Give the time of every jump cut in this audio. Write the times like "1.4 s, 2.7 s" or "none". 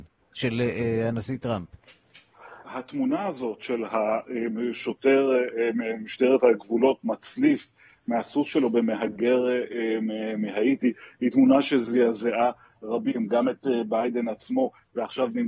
2.6 s